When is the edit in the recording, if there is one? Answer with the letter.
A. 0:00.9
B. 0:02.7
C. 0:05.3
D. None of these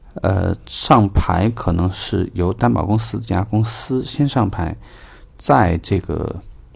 C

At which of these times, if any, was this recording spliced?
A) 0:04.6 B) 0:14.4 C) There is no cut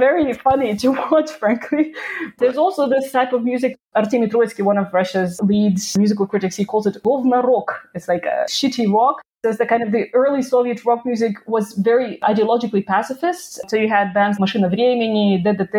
B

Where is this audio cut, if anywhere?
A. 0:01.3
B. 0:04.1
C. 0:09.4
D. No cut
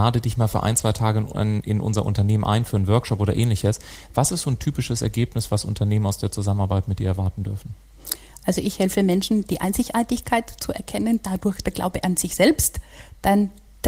D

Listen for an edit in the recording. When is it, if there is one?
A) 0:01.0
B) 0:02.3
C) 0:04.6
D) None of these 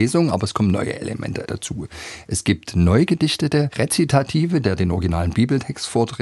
C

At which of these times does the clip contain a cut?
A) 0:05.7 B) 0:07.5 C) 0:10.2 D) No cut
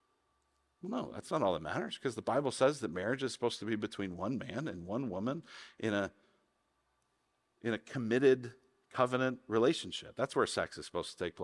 D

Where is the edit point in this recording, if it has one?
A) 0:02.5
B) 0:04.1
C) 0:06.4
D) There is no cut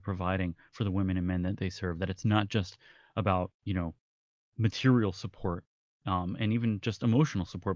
D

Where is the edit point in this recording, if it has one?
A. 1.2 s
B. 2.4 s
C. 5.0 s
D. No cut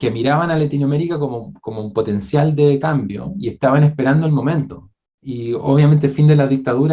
D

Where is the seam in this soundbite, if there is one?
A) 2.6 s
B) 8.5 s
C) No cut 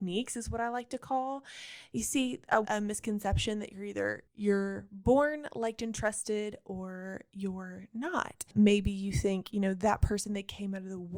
A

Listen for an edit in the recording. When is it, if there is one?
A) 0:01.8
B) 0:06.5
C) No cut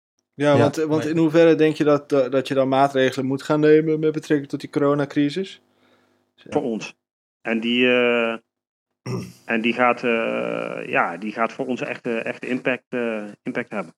B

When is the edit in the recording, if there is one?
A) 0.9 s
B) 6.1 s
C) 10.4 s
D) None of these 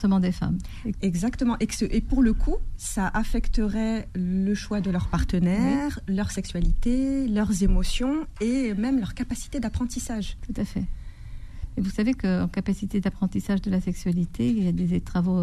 A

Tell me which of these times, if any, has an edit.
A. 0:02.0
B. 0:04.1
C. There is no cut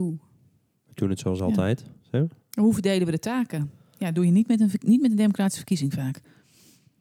A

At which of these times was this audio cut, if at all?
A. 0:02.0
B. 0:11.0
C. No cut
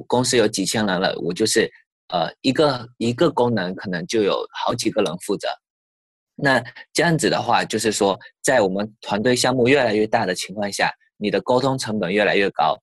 C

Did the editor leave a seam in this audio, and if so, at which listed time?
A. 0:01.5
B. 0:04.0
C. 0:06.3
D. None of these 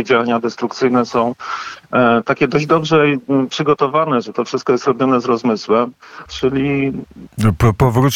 C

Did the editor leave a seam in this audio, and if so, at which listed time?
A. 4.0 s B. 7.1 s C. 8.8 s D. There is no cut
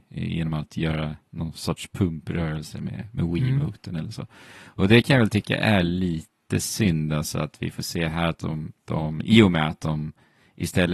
C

